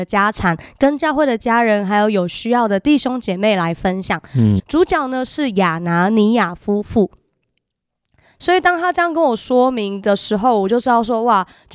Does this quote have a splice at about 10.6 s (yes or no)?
no